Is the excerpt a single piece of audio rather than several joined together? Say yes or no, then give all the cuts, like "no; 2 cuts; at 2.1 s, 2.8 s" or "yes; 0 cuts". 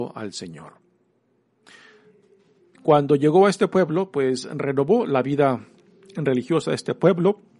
no; 1 cut; at 2.7 s